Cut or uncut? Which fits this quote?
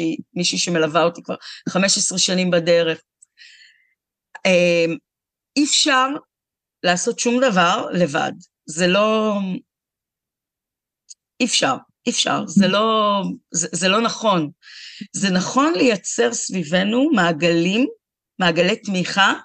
uncut